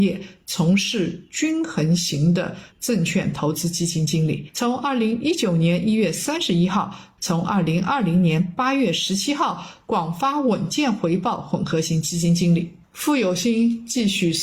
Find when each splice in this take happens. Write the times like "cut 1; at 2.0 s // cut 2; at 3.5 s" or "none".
cut 1; at 2.7 s // cut 2; at 7.2 s